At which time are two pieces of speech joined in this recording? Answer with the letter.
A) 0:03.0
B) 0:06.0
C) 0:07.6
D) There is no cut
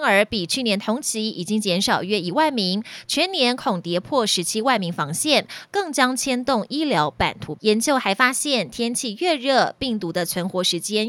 C